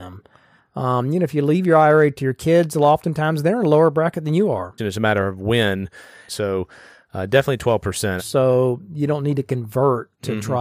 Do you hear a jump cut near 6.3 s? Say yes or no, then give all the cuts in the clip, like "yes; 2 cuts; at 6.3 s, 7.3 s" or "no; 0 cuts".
yes; 3 cuts; at 4.8 s, 6.3 s, 8.2 s